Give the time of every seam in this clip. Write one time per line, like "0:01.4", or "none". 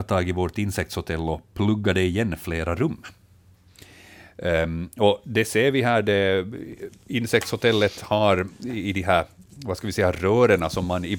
none